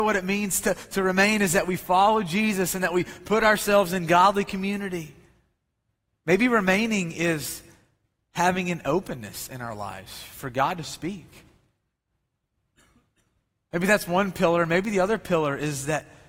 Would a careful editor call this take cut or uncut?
cut